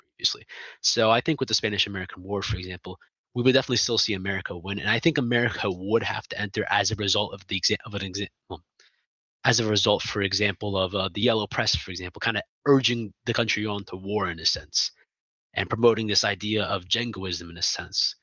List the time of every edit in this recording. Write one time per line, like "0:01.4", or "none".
none